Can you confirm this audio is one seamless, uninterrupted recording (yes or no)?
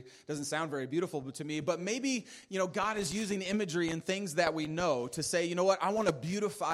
yes